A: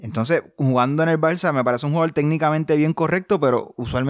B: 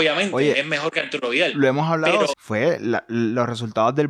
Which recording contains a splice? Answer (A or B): B